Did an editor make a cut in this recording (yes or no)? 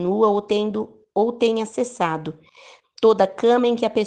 yes